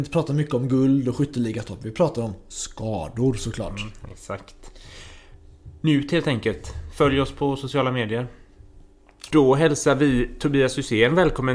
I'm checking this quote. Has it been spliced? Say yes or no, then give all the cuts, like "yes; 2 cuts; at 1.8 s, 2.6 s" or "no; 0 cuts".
yes; 1 cut; at 9.3 s